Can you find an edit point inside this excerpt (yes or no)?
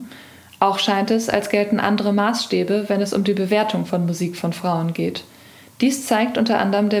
no